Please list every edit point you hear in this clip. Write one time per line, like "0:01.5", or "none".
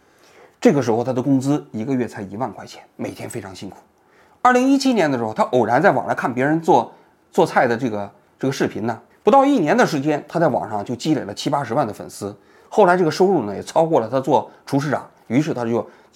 0:09.1